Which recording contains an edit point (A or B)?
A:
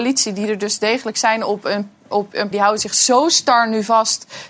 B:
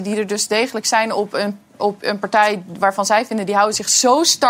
A